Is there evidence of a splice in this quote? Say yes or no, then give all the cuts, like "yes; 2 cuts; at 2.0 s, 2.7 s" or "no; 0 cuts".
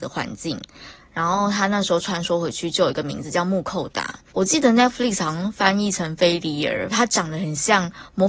yes; 2 cuts; at 4.3 s, 6.9 s